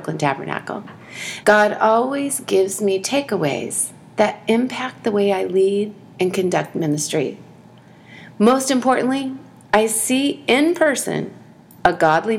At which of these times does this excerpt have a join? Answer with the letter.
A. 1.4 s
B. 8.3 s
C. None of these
A